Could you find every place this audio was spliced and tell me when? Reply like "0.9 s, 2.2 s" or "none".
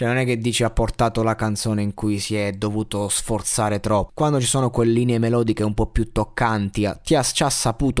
4.1 s